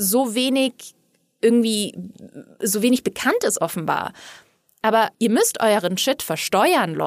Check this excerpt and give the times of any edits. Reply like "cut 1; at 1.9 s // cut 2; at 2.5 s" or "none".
cut 1; at 5.1 s